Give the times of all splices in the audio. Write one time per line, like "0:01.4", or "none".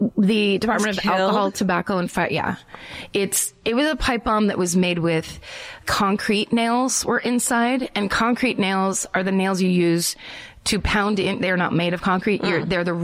none